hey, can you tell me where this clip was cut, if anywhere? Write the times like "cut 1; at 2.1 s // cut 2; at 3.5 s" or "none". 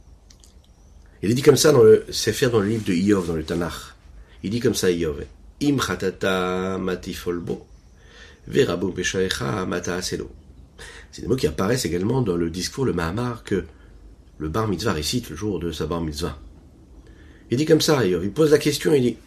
none